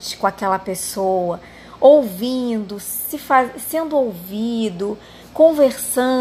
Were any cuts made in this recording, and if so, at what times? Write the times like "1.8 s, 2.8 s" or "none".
none